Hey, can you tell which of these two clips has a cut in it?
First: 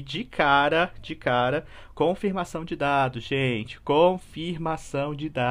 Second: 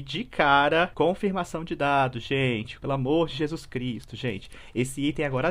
second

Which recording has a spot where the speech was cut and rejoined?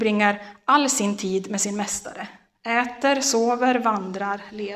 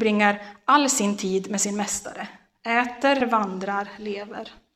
second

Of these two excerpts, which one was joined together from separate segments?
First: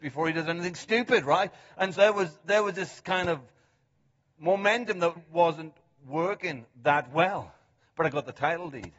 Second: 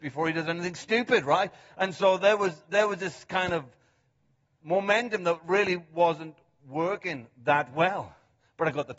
first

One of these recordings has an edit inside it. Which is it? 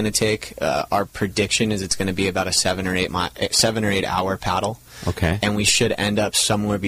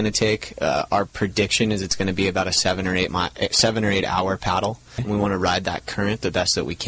second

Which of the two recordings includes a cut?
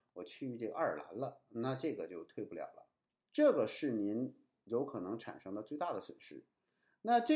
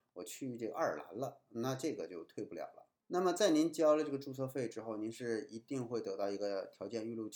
second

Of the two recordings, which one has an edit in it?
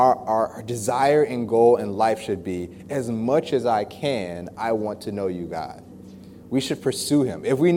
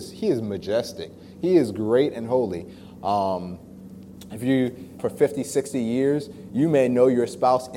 second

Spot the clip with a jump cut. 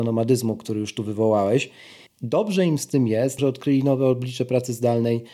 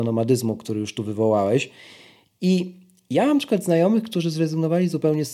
first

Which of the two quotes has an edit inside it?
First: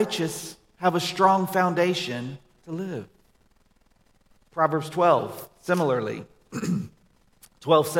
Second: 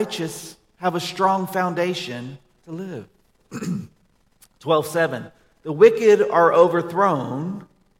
second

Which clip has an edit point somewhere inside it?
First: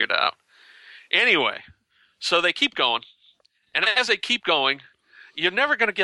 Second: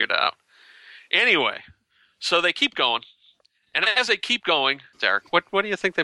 second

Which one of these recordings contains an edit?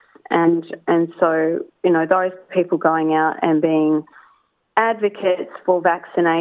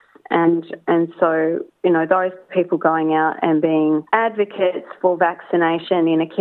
second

